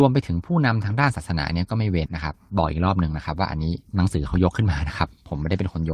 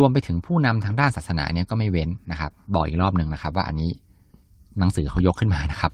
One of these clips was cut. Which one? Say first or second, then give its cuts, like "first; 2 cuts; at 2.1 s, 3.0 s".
first; 2 cuts; at 2.1 s, 3.9 s